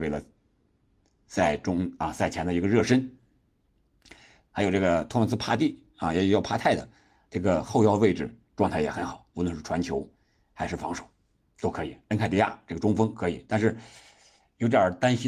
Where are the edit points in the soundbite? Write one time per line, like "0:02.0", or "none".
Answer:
0:04.5